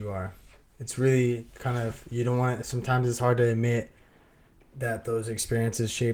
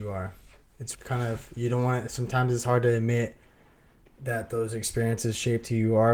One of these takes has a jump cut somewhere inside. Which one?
second; 1 cut; at 0.9 s

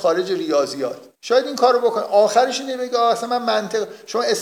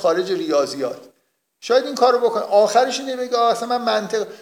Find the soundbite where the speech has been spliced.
first; 1 cut; at 1.1 s

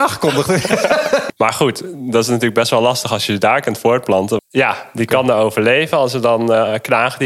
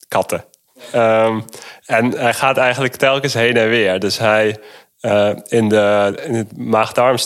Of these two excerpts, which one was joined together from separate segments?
first; 2 cuts; at 1.3 s, 4.4 s

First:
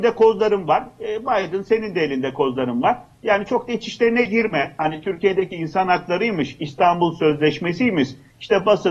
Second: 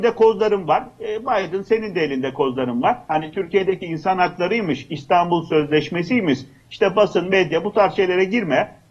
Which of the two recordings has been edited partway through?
second; 1 cut; at 3.1 s

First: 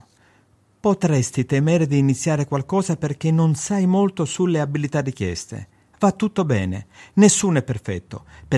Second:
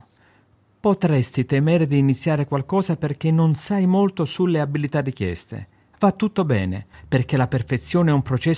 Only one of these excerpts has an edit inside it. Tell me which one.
second; 1 cut; at 6.9 s

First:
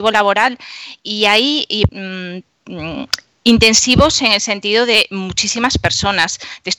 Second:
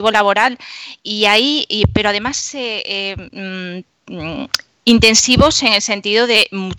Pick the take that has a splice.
first; 1 cut; at 1.9 s

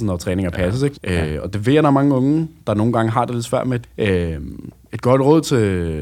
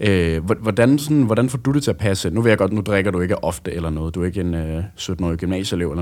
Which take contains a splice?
first; 2 cuts; at 0.9 s, 3.8 s

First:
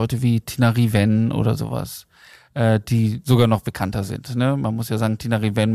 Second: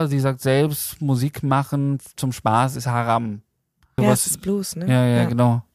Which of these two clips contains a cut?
second; 1 cut; at 4.0 s

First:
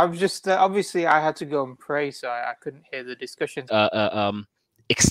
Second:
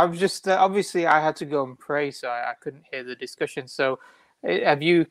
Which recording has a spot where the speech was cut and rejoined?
first; 1 cut; at 3.7 s

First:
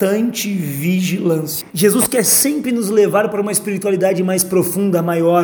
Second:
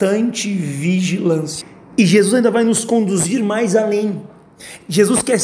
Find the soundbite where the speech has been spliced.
first; 1 cut; at 1.7 s

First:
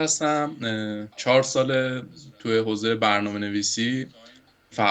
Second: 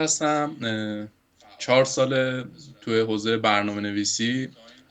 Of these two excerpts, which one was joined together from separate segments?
first; 1 cut; at 1.1 s

